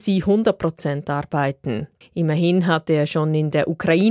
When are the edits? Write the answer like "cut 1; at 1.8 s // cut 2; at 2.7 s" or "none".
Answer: cut 1; at 2.0 s

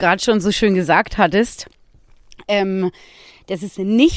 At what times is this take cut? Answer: none

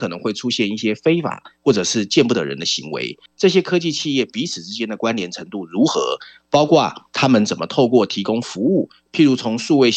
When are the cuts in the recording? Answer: cut 1; at 3.3 s

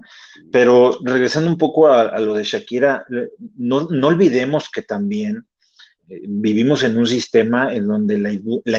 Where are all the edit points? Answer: cut 1; at 6.0 s

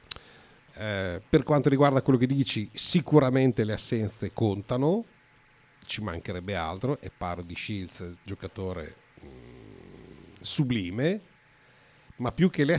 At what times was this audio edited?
none

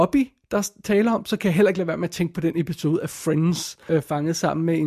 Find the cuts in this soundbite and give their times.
cut 1; at 3.9 s

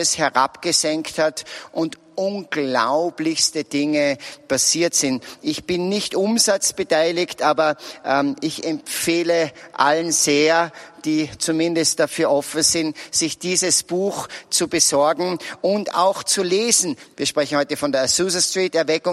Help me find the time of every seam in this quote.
cut 1; at 17.1 s

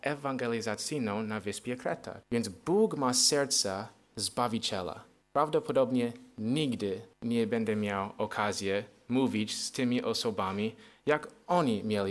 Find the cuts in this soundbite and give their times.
cut 1; at 2.2 s // cut 2; at 5.2 s // cut 3; at 7.1 s

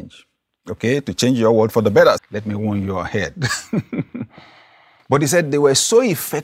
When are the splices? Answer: cut 1; at 2.2 s // cut 2; at 5.0 s

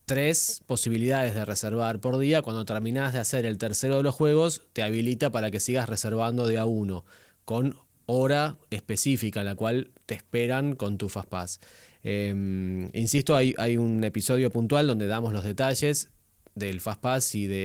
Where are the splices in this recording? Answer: none

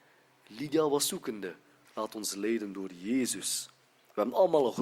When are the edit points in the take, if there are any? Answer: cut 1; at 1.9 s

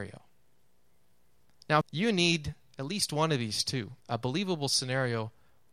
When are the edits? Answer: cut 1; at 1.8 s // cut 2; at 4.0 s

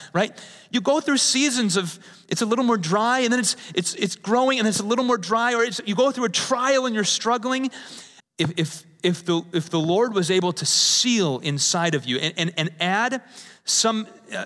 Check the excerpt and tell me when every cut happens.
cut 1; at 8.2 s

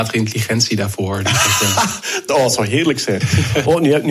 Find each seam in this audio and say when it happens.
none

